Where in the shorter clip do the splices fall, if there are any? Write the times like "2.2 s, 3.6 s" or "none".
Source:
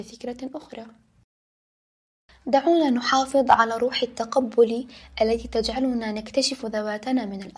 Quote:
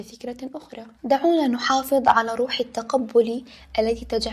0.9 s